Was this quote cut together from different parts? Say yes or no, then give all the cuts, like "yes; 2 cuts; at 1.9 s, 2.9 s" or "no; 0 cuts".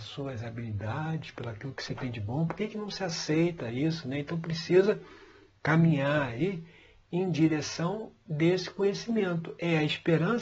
no; 0 cuts